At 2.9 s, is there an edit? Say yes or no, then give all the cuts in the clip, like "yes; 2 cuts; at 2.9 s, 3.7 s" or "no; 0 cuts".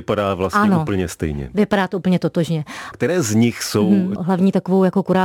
yes; 2 cuts; at 2.9 s, 4.2 s